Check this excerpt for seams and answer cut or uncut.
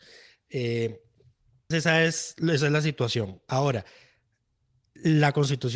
cut